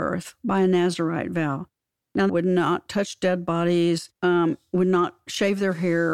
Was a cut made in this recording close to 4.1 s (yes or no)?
yes